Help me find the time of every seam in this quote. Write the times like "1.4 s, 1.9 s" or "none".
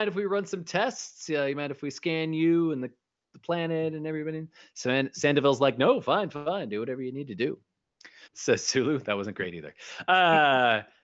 8.2 s